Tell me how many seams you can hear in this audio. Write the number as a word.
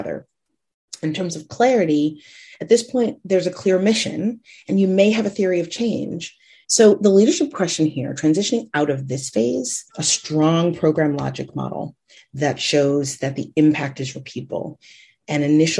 two